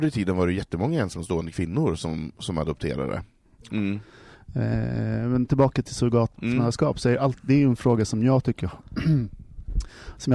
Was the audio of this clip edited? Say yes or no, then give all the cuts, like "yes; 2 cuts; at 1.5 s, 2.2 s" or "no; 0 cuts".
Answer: yes; 1 cut; at 3.7 s